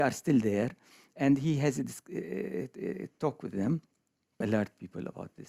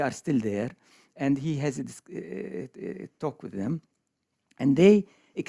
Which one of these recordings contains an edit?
first; 1 cut; at 4.4 s

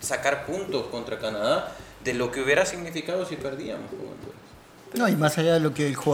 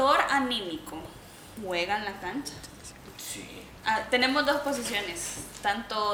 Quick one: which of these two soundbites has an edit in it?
second; 1 cut; at 3.8 s

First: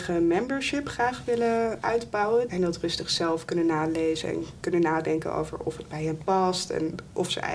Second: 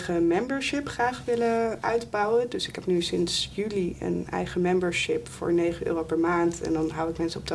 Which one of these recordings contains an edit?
first; 1 cut; at 2.5 s

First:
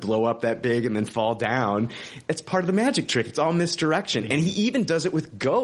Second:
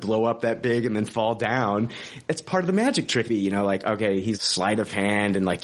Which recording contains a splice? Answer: second; 2 cuts; at 3.3 s, 4.3 s

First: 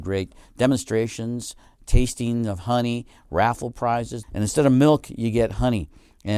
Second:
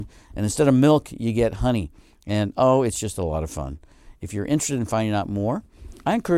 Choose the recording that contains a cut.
first; 1 cut; at 4.2 s

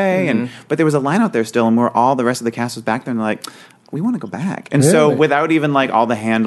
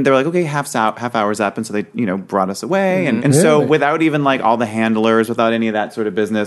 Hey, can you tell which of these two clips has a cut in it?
second; 1 cut; at 3.2 s

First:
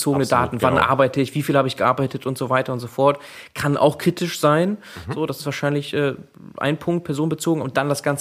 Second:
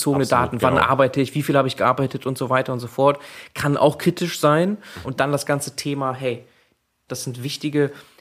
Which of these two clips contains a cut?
second; 2 cuts; at 5.0 s, 7.1 s

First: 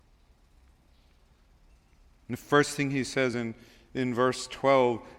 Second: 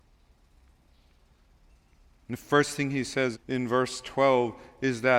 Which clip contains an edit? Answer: second; 1 cut; at 3.3 s

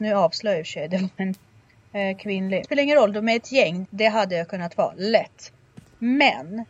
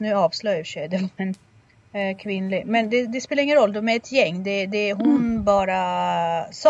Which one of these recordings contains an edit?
first; 2 cuts; at 2.6 s, 3.8 s

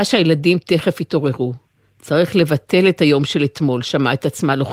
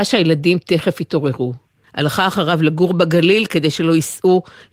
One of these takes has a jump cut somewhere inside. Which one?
second; 1 cut; at 1.8 s

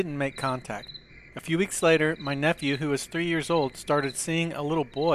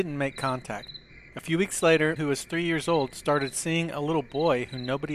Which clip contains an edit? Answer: second; 1 cut; at 2.2 s

